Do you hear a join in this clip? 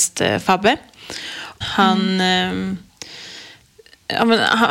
yes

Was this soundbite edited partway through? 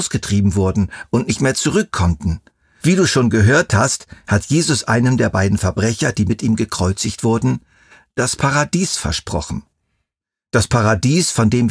yes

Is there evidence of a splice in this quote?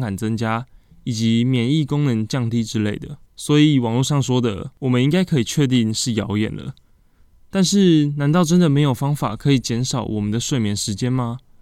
yes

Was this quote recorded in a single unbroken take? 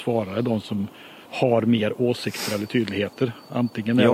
no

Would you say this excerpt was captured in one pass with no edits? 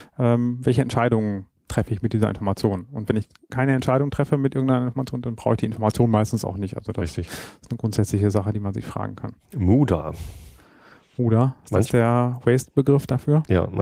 yes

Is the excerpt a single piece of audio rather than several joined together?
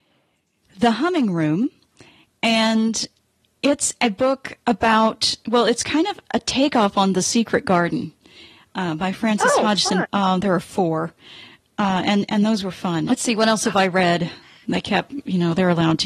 no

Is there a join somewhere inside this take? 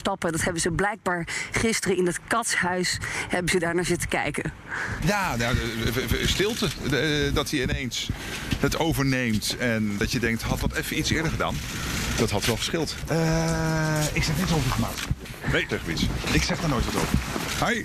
yes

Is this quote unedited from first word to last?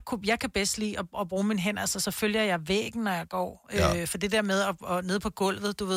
yes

